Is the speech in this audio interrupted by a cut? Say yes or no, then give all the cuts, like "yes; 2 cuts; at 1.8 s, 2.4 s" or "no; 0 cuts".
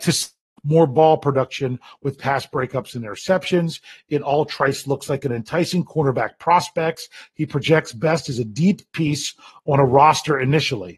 no; 0 cuts